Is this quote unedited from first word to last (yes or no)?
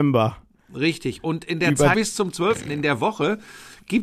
no